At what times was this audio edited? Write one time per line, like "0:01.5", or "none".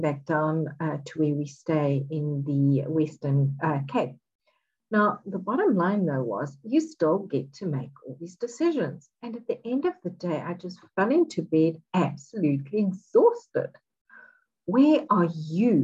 none